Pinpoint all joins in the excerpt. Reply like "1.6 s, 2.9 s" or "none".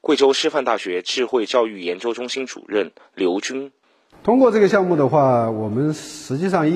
none